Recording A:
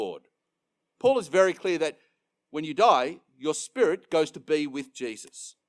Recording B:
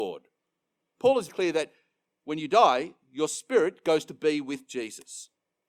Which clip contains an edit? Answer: B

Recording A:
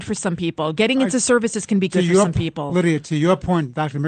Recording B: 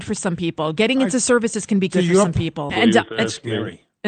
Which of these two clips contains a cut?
B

